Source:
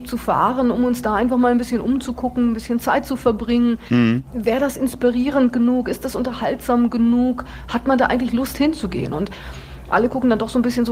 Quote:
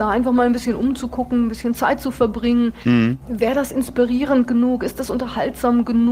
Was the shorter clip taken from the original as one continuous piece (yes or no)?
yes